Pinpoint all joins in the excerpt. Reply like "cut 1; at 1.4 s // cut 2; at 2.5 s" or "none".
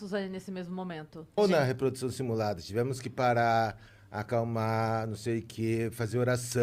cut 1; at 1.4 s